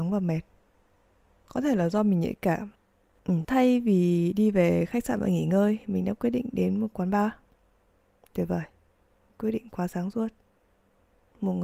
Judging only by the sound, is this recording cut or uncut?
cut